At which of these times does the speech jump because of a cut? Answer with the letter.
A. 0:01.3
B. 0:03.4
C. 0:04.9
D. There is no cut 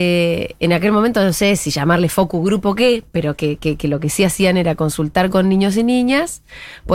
D